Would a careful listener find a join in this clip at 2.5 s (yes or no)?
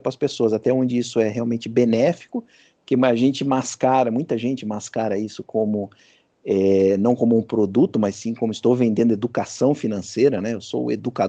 no